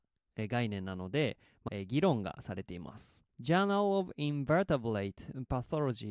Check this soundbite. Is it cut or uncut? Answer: cut